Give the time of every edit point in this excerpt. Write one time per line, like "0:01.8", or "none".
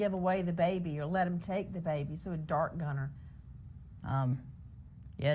0:04.0